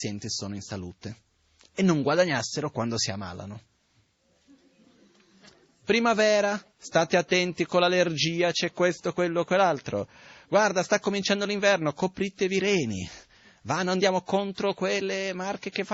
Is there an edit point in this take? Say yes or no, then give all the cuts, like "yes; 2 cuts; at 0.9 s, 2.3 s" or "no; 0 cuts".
no; 0 cuts